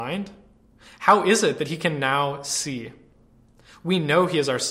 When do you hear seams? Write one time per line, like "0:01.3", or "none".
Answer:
none